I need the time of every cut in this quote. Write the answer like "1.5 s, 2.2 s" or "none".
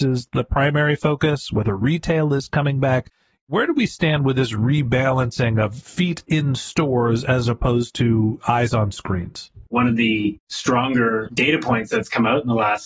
9.7 s